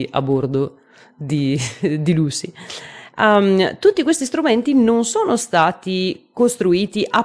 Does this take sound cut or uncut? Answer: uncut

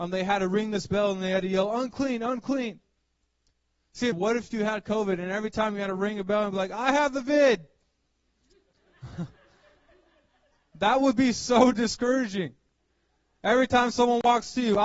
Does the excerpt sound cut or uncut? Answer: cut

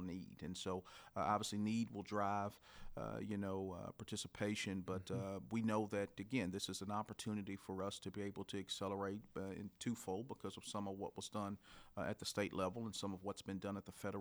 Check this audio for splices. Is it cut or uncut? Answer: uncut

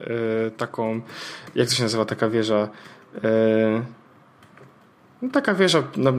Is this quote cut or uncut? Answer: uncut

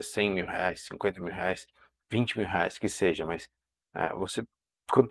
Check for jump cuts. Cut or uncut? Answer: uncut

